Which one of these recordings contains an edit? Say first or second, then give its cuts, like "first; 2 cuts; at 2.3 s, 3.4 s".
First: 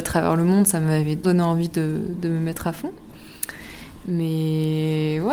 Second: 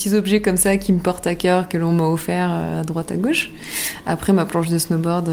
first; 1 cut; at 1.2 s